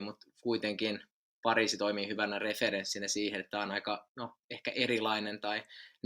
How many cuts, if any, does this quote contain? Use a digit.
0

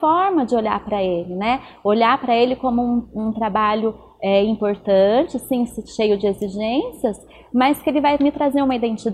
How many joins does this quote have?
0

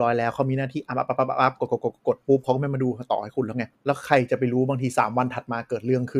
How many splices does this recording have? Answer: 1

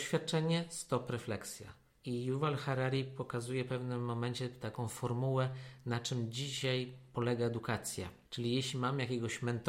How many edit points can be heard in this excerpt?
2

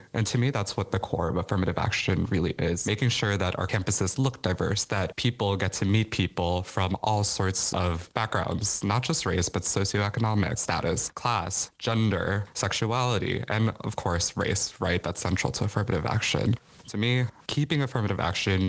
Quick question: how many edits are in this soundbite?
0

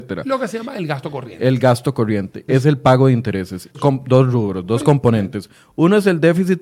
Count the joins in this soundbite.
2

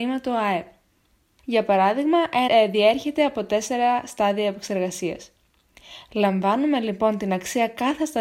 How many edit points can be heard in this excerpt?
2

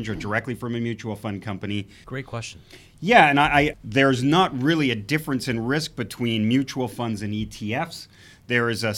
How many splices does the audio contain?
2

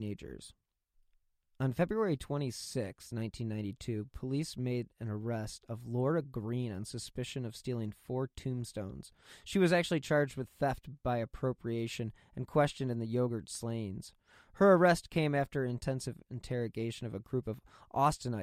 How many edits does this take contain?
0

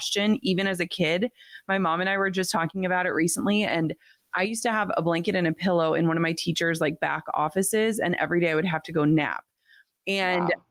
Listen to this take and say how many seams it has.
0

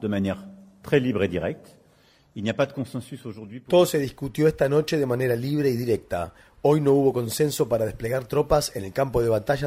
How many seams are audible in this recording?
0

